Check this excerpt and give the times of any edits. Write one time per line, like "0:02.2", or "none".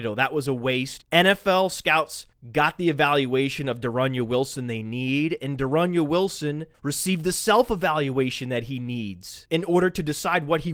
0:01.0

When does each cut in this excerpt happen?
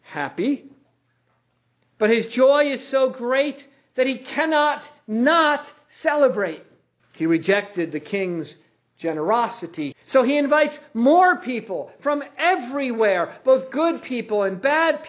0:07.0
0:09.9

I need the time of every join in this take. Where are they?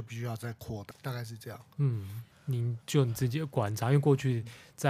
0:00.9
0:02.3

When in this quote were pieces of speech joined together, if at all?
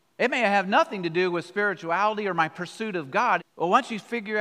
0:03.4

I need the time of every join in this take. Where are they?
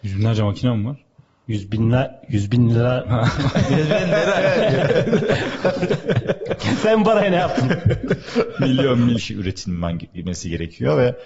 0:09.2

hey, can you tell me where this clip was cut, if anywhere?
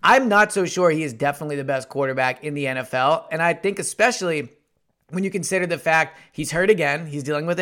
none

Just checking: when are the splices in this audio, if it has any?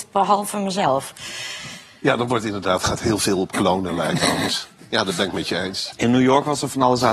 0:05.9

